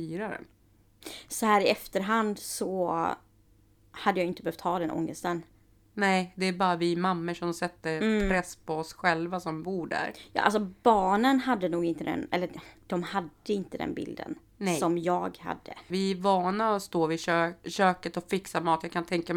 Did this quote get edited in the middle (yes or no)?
yes